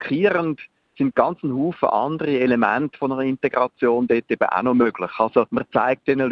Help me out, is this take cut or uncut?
uncut